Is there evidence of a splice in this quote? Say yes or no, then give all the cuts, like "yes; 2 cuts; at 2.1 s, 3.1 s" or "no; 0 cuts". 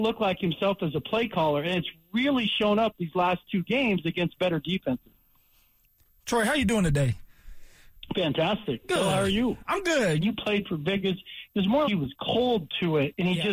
yes; 2 cuts; at 10.2 s, 11.8 s